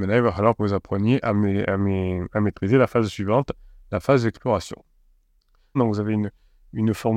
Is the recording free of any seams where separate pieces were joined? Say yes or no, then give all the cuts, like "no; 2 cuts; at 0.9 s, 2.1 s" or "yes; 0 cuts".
no; 1 cut; at 5.8 s